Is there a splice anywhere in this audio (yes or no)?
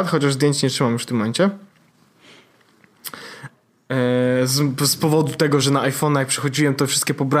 no